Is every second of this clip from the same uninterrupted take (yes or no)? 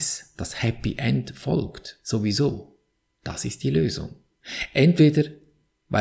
yes